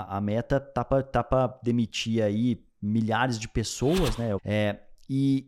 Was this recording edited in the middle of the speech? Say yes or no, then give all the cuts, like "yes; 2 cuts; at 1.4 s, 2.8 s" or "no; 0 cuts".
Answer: yes; 1 cut; at 4.4 s